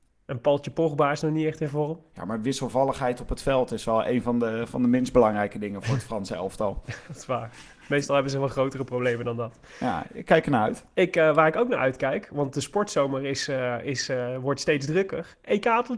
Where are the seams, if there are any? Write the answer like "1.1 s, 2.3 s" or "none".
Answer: none